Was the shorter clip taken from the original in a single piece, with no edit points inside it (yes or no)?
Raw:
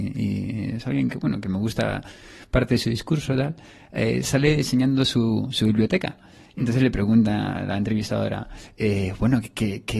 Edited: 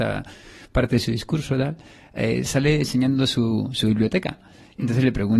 yes